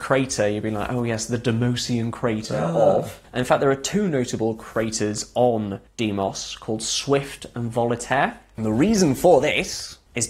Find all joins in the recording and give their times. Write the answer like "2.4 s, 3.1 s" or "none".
none